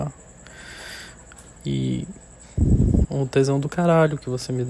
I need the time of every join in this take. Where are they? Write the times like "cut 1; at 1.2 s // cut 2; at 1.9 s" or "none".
cut 1; at 1.6 s // cut 2; at 3.0 s